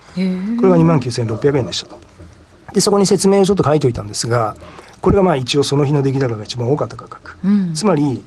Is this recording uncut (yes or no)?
yes